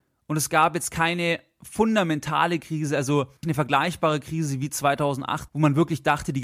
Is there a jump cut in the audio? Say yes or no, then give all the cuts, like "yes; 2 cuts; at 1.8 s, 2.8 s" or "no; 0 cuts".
yes; 2 cuts; at 3.4 s, 5.5 s